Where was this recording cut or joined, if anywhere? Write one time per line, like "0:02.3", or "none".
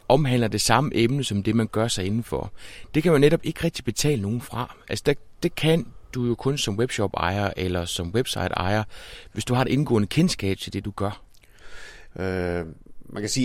0:12.1